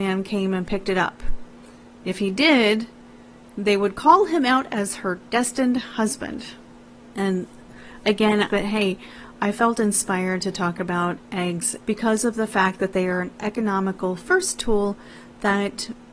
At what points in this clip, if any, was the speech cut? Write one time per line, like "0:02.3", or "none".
0:07.1
0:08.5
0:11.8